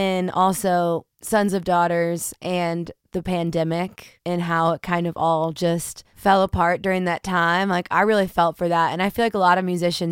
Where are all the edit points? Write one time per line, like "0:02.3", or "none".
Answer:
0:01.1